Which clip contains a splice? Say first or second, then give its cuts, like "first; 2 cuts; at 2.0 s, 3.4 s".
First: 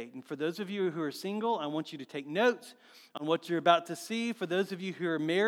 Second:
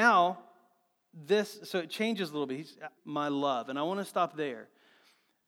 second; 1 cut; at 3.0 s